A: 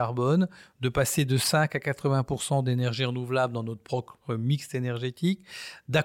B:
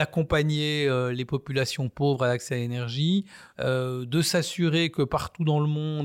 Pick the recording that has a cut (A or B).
B